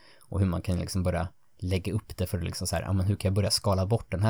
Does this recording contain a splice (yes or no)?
no